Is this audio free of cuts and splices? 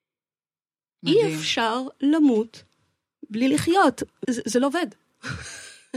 no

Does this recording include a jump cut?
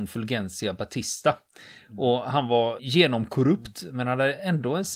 yes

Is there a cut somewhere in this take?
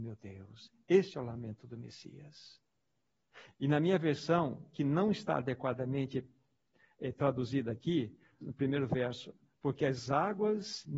yes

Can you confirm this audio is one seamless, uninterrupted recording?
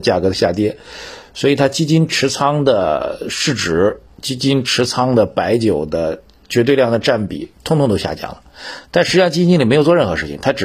yes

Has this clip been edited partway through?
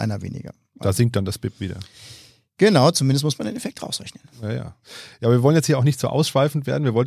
no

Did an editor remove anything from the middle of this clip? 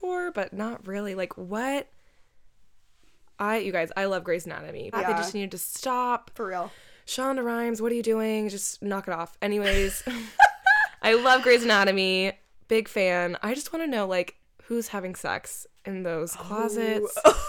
yes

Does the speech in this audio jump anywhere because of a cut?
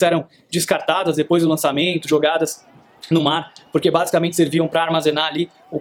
no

